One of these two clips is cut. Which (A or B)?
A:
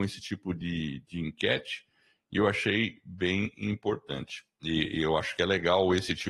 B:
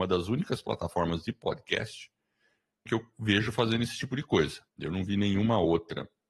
B